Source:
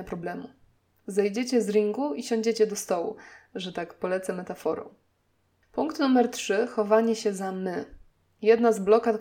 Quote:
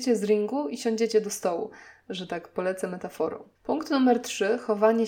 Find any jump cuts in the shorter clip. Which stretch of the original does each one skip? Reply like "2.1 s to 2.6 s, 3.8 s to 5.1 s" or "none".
5.0 s to 5.6 s